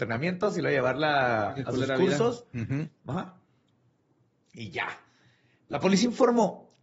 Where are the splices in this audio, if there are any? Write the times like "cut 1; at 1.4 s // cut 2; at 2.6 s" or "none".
none